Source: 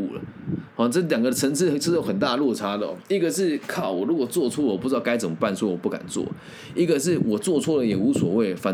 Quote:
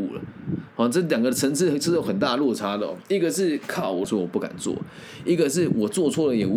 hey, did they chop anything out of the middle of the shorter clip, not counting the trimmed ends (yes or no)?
yes